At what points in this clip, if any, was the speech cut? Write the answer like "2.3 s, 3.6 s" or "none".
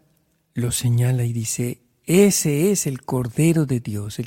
none